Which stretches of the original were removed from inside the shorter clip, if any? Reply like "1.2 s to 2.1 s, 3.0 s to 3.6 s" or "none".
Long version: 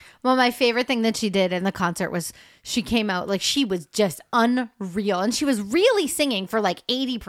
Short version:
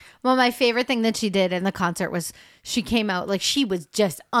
none